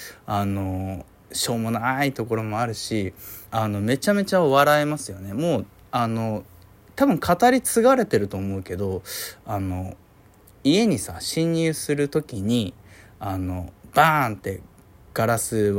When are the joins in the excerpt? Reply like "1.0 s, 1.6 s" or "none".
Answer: 3.5 s

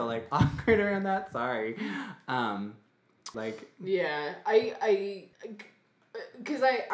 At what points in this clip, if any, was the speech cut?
3.3 s, 5.3 s

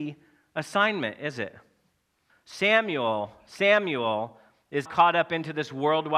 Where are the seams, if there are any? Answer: 2.3 s, 4.9 s

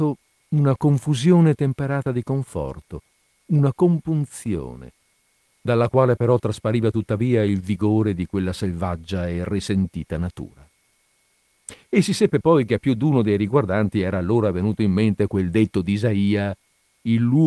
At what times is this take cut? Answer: 3.3 s

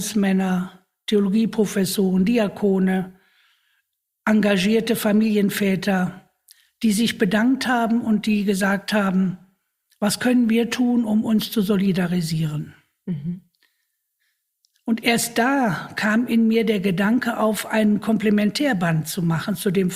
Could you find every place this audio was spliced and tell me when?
none

